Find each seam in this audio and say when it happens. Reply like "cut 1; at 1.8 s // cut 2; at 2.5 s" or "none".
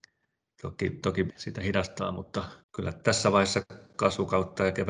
cut 1; at 1.3 s // cut 2; at 2.6 s